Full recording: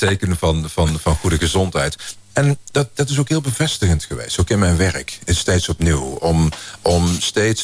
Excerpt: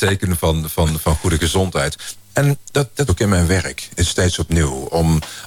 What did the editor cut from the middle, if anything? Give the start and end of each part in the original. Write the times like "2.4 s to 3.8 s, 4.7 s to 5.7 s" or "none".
3.1 s to 4.4 s